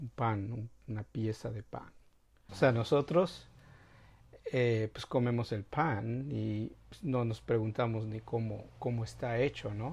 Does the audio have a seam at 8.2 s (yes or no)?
no